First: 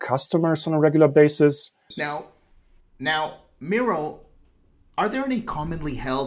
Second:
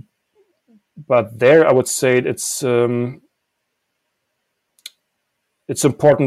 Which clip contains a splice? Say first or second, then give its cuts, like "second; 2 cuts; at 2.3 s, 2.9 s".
first; 1 cut; at 1.9 s